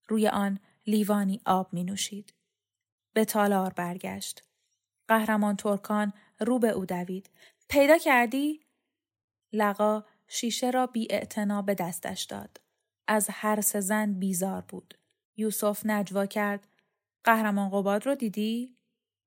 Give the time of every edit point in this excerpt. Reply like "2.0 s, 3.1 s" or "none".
3.0 s, 15.2 s